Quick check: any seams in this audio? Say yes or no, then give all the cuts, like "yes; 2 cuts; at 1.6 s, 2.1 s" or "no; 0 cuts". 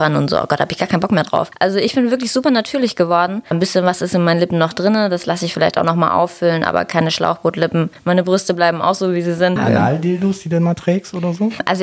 yes; 1 cut; at 9.6 s